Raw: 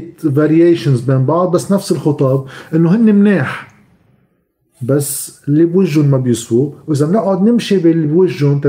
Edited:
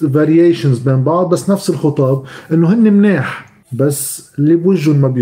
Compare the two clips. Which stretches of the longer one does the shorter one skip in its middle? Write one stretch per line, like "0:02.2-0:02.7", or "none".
0:03.8-0:04.7